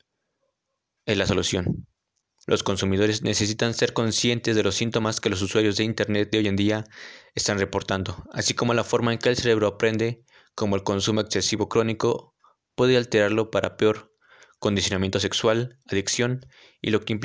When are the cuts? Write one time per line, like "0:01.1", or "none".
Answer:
0:02.4